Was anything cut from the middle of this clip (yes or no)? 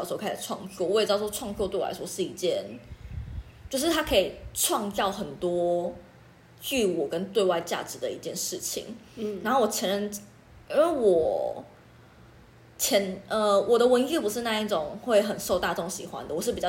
no